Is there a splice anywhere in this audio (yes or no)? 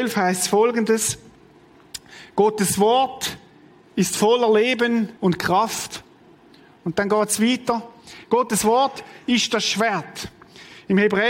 yes